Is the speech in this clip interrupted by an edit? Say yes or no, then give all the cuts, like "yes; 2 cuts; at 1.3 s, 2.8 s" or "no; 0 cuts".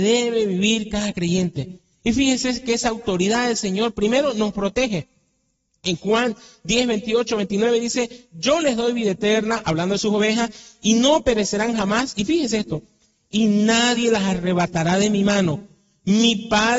no; 0 cuts